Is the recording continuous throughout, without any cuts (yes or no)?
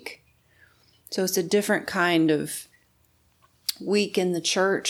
yes